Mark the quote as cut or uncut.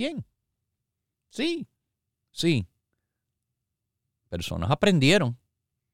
cut